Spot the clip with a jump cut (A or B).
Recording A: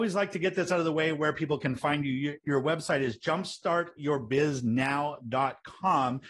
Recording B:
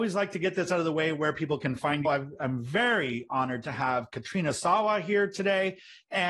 B